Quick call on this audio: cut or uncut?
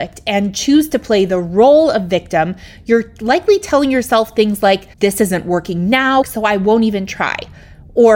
cut